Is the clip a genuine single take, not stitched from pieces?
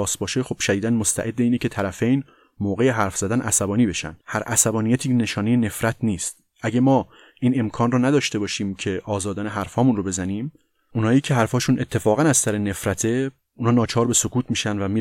no; 1 cut; at 4.2 s

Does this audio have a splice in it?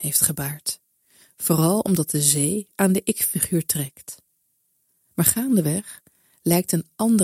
no; 0 cuts

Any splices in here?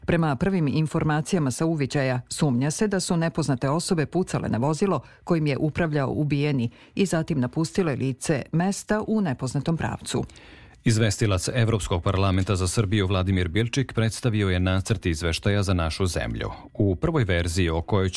no; 0 cuts

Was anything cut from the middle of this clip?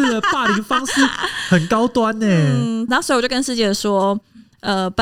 yes; 1 cut; at 2.9 s

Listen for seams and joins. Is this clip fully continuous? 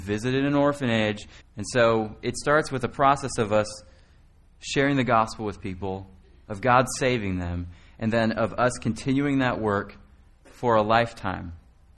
no; 1 cut; at 1.4 s

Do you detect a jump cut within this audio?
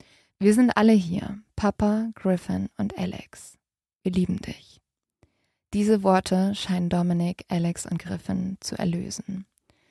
no; 0 cuts

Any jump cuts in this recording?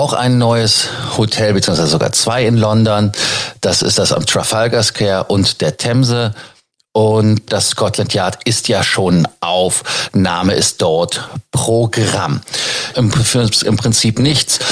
yes; 2 cuts; at 7.5 s, 12.9 s

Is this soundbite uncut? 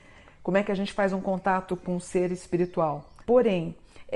no; 1 cut; at 3.2 s

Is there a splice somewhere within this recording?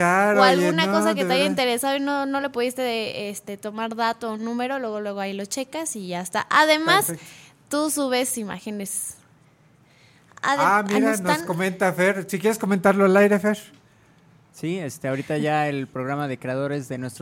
no; 0 cuts

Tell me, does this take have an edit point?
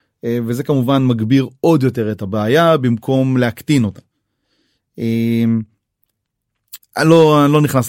yes; 1 cut; at 6.8 s

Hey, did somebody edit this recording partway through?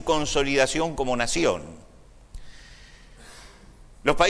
no; 0 cuts

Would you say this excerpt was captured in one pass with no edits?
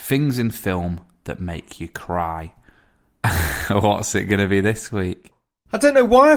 yes; 0 cuts

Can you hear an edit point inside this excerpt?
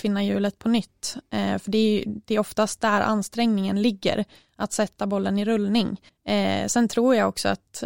yes; 1 cut; at 6.1 s

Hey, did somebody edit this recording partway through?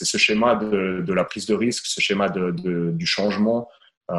no; 0 cuts

